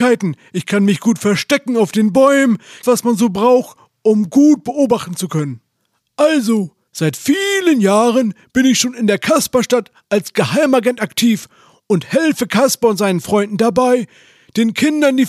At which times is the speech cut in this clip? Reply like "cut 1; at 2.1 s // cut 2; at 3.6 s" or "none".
cut 1; at 2.8 s // cut 2; at 6.9 s